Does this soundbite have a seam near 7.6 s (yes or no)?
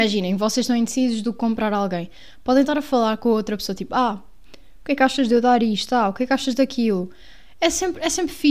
no